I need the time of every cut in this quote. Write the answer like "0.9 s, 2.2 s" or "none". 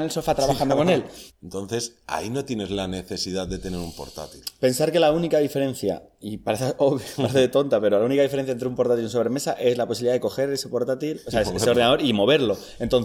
1.3 s